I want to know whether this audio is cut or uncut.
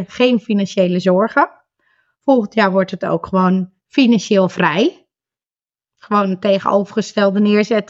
uncut